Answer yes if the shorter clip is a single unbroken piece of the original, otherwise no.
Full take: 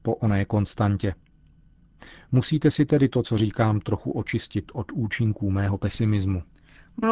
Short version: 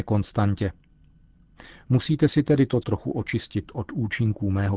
no